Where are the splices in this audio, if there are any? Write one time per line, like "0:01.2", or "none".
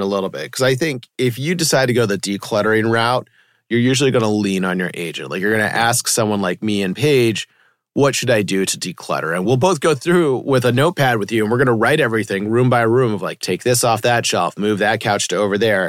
0:13.4